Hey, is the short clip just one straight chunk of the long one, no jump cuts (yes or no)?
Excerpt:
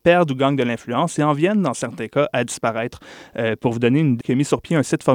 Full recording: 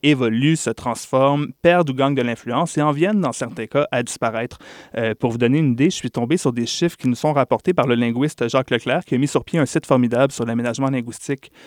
no